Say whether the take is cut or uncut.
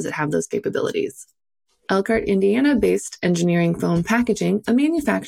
uncut